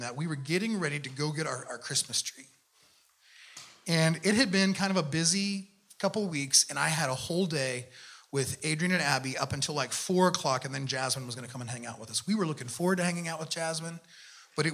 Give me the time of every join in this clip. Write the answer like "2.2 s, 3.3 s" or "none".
none